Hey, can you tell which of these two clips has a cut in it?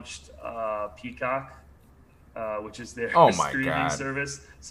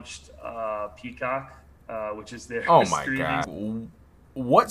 second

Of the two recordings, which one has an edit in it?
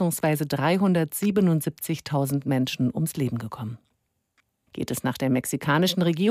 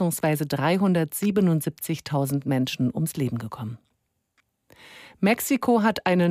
first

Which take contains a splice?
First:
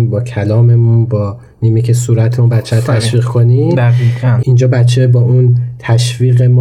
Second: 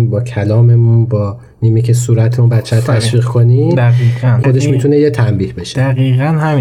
second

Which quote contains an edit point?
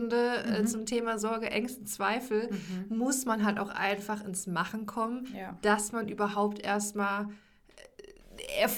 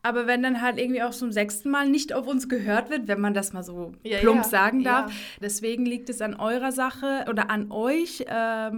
second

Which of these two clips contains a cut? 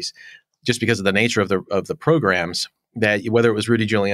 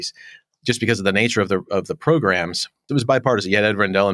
second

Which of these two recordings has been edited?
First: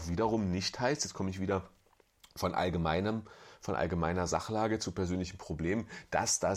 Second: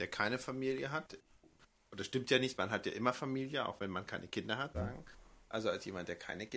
second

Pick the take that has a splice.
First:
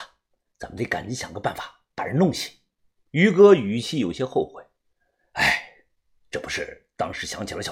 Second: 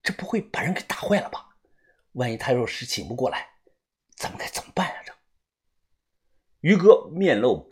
first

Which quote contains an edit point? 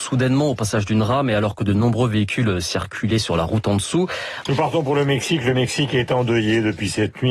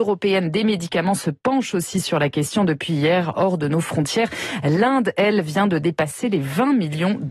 first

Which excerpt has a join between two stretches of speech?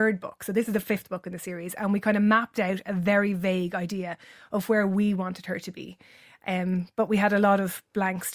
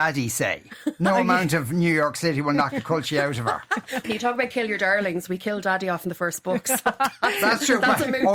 second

